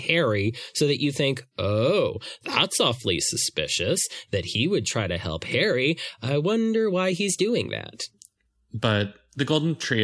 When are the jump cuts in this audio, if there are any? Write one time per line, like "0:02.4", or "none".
0:02.4